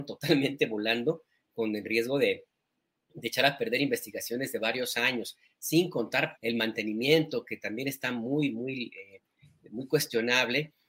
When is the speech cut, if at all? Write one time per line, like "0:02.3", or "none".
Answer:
0:06.4